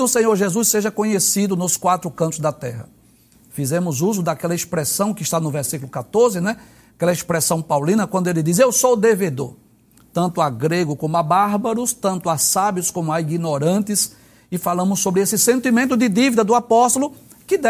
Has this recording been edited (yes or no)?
no